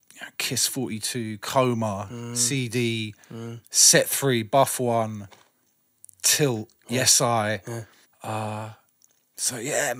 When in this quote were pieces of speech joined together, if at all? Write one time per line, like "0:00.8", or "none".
0:08.0